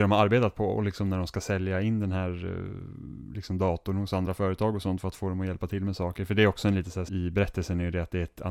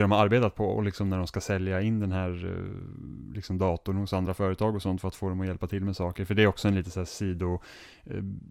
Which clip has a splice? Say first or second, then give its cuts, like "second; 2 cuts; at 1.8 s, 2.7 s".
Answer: first; 1 cut; at 7.1 s